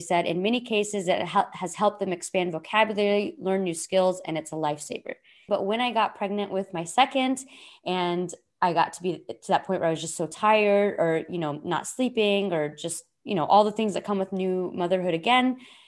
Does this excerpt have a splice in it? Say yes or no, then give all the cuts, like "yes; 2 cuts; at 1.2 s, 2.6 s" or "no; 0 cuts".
yes; 1 cut; at 5.5 s